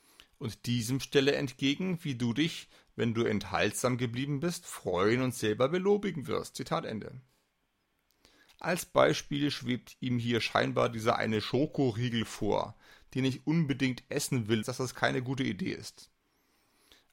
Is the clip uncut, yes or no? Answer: no